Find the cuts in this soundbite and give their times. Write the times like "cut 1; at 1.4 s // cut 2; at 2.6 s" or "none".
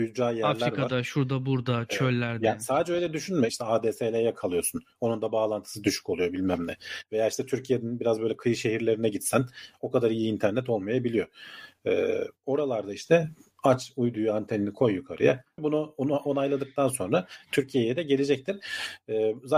cut 1; at 3.5 s // cut 2; at 15.6 s